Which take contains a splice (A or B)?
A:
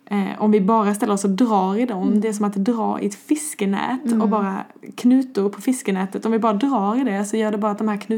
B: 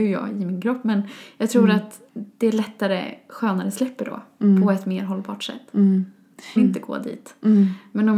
B